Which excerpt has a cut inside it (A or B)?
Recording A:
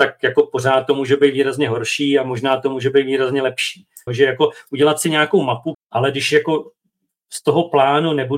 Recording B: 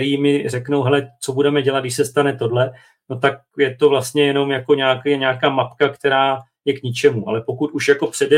A